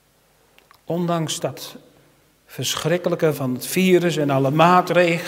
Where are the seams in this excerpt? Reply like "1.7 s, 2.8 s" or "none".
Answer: 1.4 s, 3.3 s